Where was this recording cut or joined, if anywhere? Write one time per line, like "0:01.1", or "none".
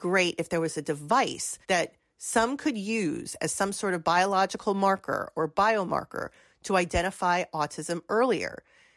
0:01.6